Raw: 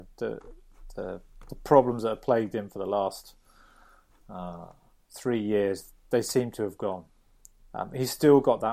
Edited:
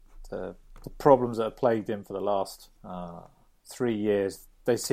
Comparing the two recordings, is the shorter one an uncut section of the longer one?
no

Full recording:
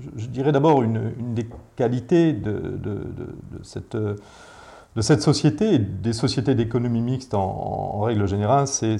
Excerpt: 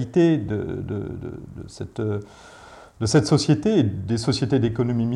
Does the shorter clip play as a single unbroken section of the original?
yes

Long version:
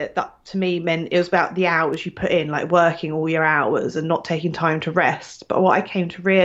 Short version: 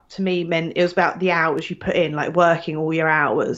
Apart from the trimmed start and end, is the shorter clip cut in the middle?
no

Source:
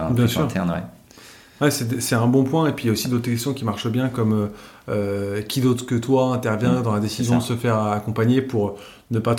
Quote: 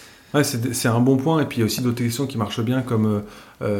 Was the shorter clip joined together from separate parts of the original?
no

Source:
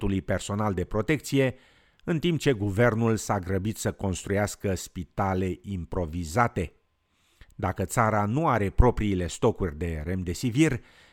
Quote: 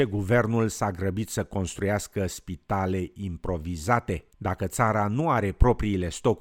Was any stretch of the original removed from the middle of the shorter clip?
yes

